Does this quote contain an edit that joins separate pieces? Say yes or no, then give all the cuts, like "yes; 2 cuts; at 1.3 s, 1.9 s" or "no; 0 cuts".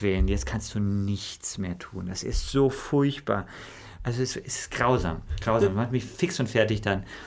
yes; 1 cut; at 4.0 s